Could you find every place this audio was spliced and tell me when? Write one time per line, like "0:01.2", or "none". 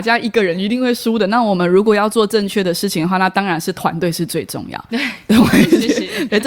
0:04.9